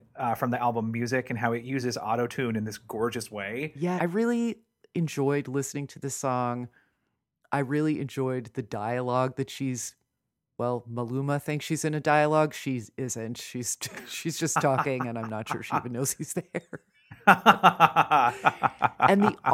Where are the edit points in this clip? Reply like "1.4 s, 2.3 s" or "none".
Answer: 4.0 s

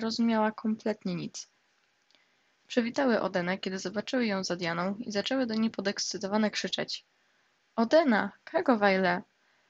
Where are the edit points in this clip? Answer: none

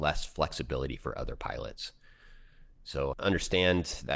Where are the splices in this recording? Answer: 3.1 s

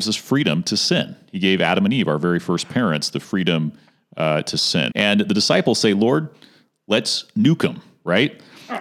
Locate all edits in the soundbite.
4.9 s

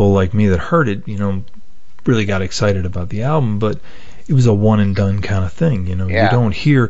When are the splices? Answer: none

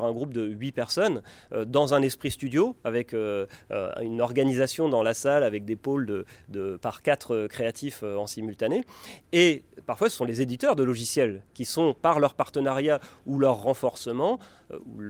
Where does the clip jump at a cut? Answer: 9.2 s

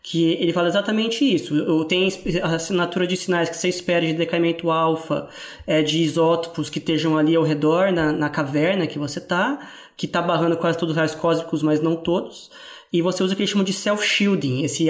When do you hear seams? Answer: none

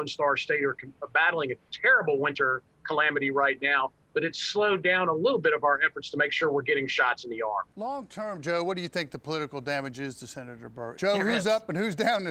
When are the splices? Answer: 7.7 s, 10.9 s

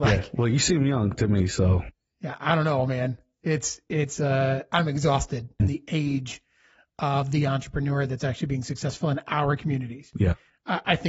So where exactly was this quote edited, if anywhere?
5.6 s

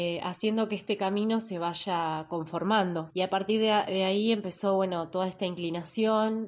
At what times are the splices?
3.1 s

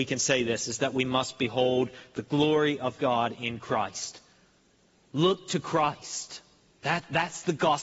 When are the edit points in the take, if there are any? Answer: none

